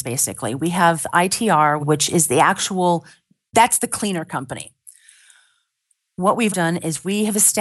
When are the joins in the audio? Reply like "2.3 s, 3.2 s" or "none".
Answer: 1.8 s, 6.5 s